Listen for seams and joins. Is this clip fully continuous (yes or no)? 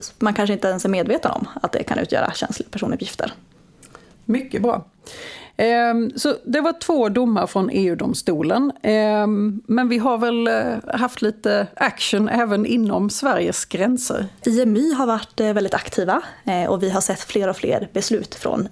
no